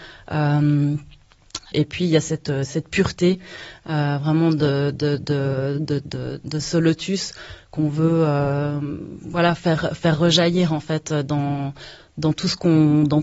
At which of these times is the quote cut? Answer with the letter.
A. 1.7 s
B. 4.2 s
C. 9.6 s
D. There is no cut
A